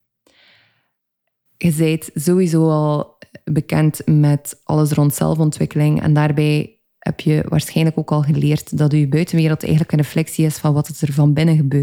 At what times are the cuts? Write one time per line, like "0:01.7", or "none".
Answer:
none